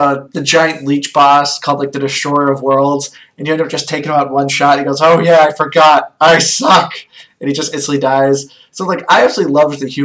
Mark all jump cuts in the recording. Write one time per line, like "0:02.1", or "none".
none